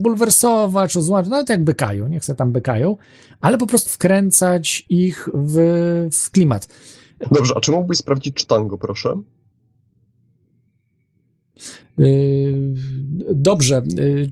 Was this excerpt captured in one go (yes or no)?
no